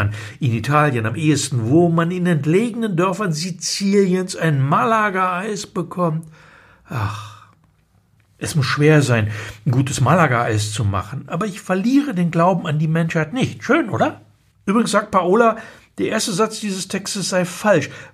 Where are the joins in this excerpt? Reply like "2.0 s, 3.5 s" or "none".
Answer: 14.5 s